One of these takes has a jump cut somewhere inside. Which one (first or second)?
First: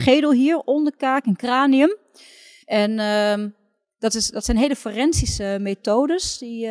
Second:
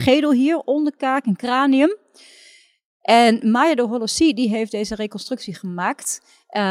first